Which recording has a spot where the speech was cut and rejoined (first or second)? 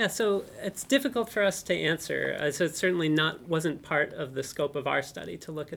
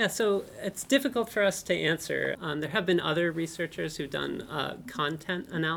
second